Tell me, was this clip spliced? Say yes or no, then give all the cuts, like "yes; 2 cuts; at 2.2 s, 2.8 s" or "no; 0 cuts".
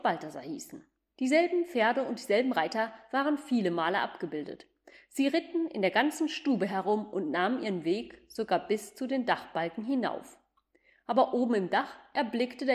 no; 0 cuts